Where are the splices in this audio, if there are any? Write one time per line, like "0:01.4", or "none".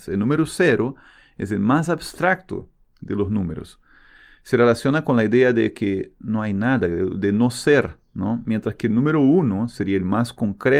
none